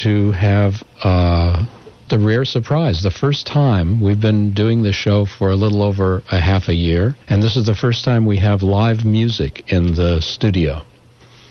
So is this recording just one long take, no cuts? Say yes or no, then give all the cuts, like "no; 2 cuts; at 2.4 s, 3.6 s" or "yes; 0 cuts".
no; 2 cuts; at 2.1 s, 7.2 s